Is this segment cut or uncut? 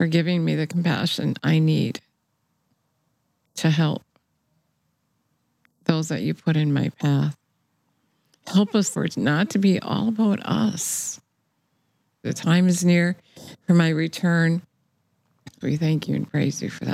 cut